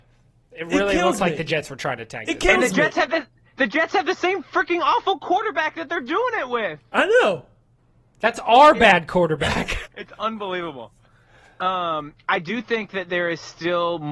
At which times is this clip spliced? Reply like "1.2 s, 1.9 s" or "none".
9.8 s